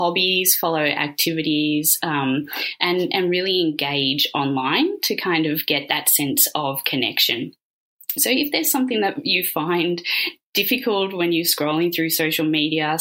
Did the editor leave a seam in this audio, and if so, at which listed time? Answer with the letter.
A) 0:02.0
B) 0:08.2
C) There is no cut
B